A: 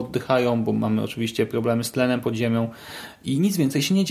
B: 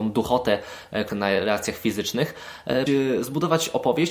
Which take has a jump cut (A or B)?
B